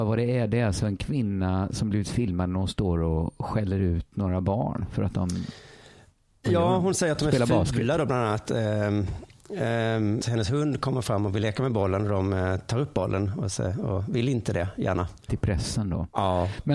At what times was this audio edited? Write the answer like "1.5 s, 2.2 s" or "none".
10.2 s, 15.3 s